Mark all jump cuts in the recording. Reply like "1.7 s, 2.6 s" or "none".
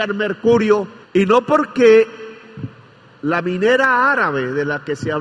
1.0 s